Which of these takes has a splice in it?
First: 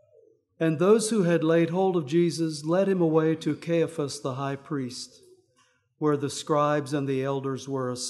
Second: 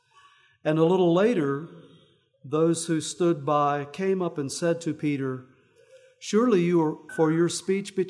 second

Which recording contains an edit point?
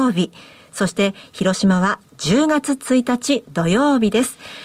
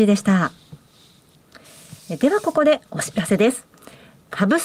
second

